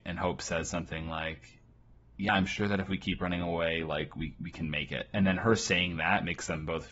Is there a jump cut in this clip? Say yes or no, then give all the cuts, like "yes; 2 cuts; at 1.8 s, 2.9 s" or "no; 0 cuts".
no; 0 cuts